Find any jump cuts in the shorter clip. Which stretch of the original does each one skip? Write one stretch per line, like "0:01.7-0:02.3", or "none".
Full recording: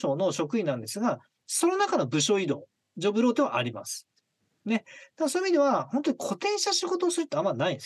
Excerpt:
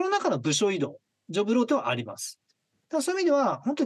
0:04.5-0:05.1